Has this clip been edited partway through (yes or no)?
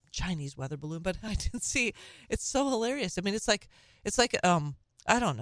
no